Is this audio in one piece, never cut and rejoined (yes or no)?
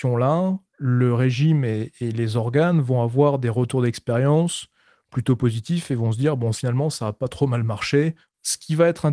yes